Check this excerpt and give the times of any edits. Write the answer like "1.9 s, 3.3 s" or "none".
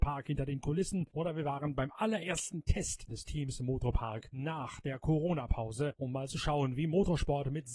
3.1 s

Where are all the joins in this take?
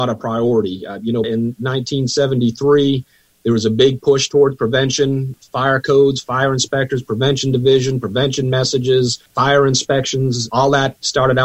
1.2 s

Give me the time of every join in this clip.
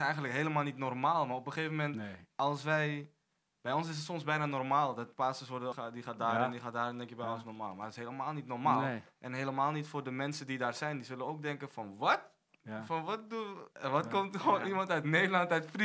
5.7 s, 13.7 s

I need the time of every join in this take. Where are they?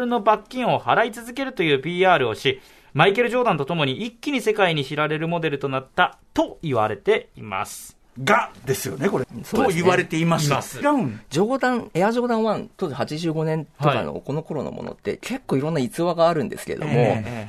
9.2 s, 10.8 s

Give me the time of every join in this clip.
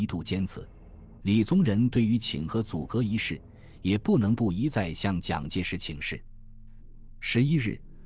1.2 s, 6.8 s

